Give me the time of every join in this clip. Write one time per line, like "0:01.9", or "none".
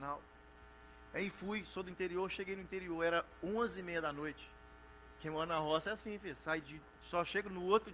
0:07.0